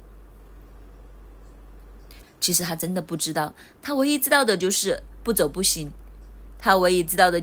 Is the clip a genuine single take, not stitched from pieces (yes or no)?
no